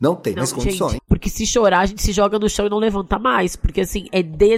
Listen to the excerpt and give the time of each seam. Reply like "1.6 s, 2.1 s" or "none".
1.0 s